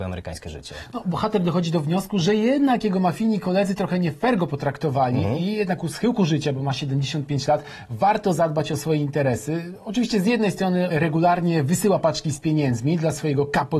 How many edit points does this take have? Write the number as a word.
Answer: zero